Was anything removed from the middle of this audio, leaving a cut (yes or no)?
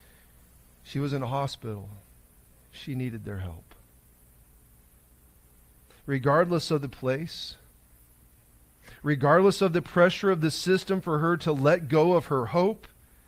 no